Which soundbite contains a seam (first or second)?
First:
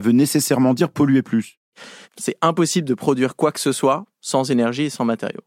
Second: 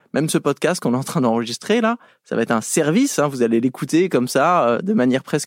second